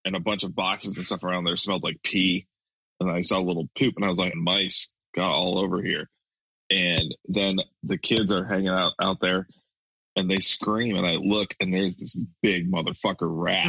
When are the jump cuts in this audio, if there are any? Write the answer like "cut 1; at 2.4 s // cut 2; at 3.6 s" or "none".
cut 1; at 4.3 s